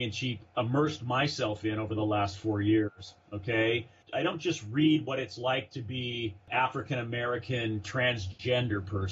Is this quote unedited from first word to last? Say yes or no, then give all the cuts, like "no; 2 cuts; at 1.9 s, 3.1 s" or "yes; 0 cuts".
no; 1 cut; at 3.2 s